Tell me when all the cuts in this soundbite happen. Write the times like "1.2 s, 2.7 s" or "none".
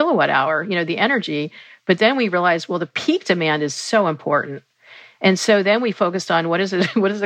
none